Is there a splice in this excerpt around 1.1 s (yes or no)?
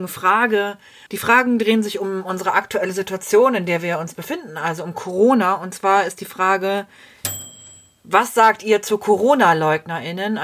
yes